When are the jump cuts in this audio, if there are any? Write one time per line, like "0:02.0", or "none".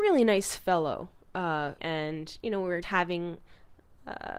0:01.8
0:02.8